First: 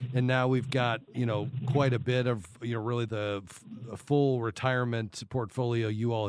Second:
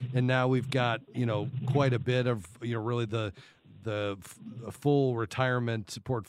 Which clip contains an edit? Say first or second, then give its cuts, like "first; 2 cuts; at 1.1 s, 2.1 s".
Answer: first; 1 cut; at 3.1 s